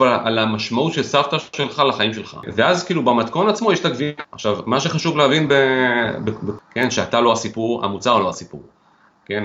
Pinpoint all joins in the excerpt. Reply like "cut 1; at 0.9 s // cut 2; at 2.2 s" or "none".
cut 1; at 6.6 s